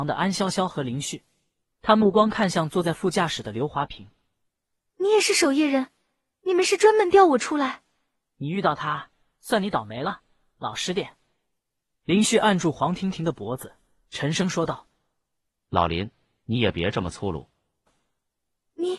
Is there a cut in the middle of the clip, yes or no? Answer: yes